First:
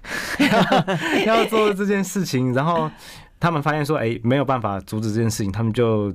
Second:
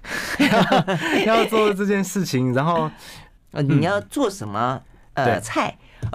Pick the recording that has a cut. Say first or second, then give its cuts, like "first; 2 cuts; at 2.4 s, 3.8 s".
second; 1 cut; at 3.4 s